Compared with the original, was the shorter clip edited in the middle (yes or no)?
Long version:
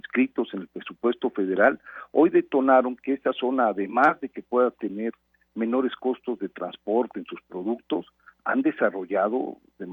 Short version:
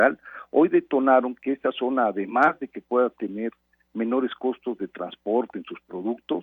no